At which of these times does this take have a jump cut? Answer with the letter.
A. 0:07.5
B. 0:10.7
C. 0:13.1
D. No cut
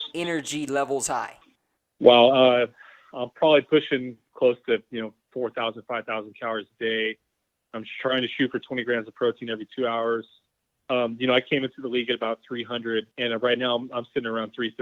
C